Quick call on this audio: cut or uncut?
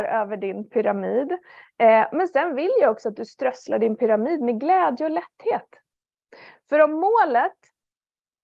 uncut